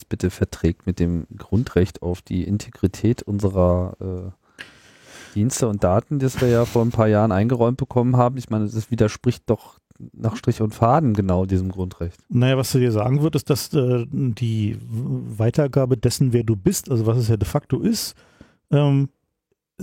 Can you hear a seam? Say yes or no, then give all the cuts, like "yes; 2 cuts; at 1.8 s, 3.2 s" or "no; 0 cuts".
no; 0 cuts